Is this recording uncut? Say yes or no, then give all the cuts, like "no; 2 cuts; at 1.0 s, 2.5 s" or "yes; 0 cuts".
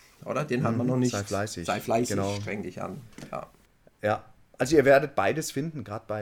yes; 0 cuts